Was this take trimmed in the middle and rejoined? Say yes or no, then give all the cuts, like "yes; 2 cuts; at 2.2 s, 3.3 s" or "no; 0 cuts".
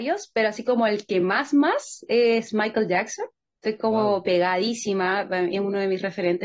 no; 0 cuts